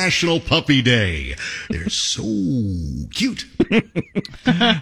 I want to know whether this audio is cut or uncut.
cut